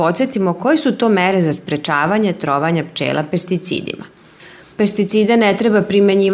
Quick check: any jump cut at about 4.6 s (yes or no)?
yes